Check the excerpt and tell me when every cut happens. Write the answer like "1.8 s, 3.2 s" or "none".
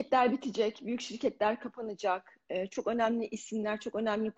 none